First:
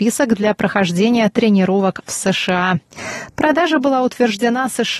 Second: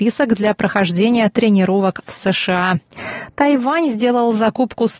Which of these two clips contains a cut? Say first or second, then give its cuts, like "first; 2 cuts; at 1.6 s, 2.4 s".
first; 1 cut; at 3.3 s